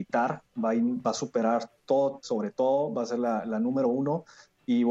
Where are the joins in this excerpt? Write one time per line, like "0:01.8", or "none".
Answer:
0:02.2

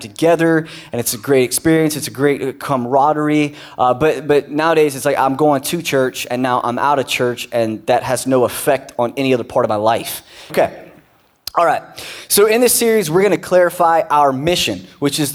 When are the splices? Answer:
0:10.5

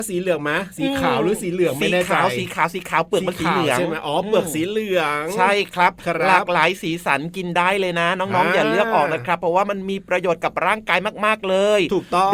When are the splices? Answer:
none

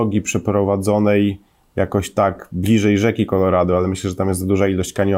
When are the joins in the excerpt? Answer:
none

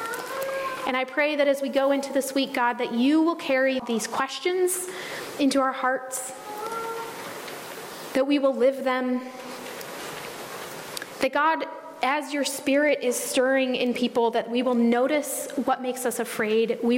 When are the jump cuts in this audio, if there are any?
0:03.8

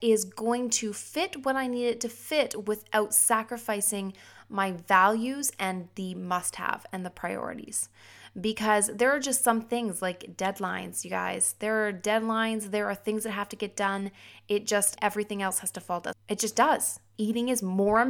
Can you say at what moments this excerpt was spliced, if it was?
0:15.0
0:16.1

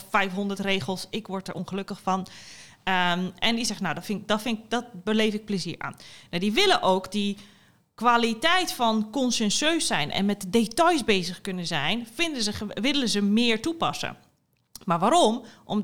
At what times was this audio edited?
none

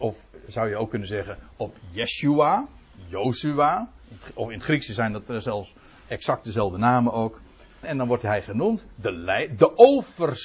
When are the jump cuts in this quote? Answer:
0:07.8

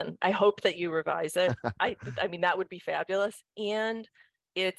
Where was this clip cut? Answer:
none

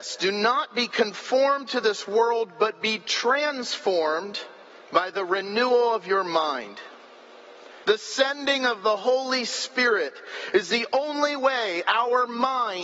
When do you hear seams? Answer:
0:07.8

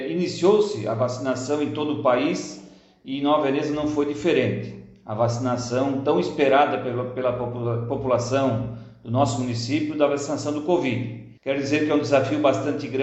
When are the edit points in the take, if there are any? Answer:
0:11.4

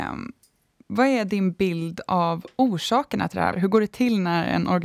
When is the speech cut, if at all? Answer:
0:03.5

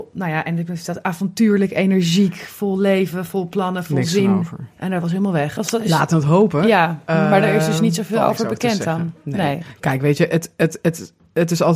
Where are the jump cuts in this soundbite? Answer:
0:05.6

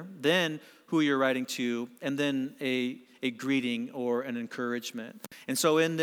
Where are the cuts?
none

